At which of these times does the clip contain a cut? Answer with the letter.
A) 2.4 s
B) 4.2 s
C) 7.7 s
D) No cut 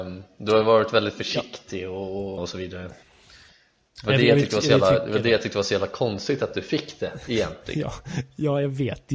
A